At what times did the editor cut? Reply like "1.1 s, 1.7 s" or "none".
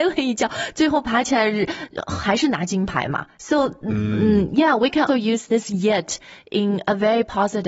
3.3 s, 5.1 s